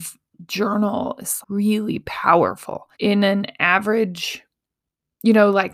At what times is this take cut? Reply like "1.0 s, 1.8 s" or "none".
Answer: 1.4 s, 2.9 s